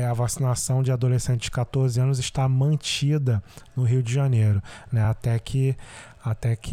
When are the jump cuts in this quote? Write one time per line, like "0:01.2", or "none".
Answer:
none